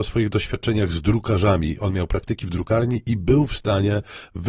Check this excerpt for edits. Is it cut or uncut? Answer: uncut